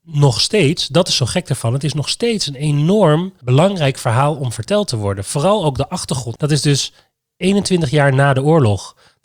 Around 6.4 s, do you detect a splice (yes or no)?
yes